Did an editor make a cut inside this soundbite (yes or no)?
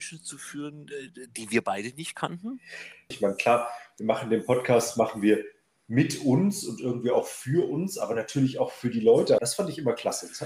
yes